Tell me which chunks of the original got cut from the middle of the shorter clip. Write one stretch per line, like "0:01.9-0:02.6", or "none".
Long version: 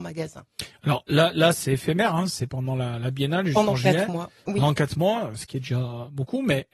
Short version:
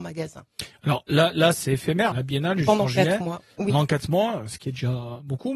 0:02.1-0:03.0